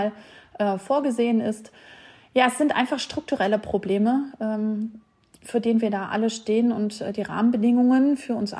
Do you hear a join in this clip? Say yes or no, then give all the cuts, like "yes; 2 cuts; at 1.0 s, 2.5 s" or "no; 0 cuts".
no; 0 cuts